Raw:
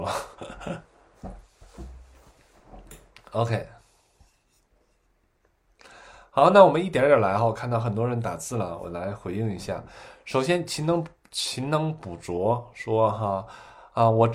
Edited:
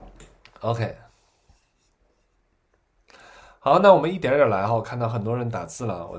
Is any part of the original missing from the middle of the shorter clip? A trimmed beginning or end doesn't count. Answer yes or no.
no